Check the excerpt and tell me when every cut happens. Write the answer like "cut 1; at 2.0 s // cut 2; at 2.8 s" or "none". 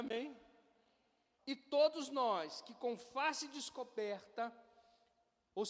cut 1; at 1.4 s